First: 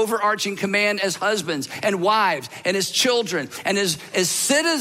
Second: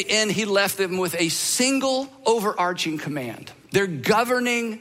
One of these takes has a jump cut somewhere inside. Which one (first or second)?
second